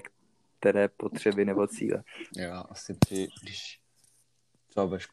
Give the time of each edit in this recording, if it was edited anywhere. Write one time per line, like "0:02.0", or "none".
0:02.3